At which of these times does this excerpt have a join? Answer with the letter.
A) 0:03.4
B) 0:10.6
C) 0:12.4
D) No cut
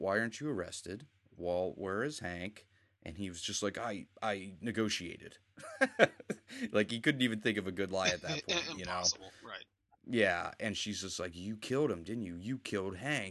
D